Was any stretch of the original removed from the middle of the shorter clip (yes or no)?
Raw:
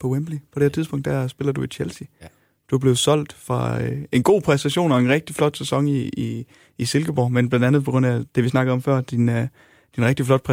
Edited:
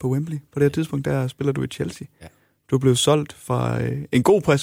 no